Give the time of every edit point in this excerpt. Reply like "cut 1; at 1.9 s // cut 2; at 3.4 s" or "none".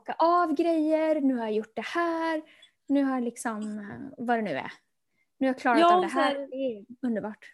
none